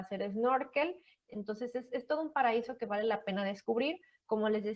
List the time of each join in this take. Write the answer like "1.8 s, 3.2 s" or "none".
none